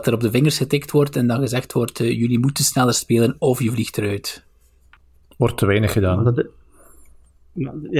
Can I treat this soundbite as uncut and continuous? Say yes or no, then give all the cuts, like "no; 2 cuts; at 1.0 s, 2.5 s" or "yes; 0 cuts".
yes; 0 cuts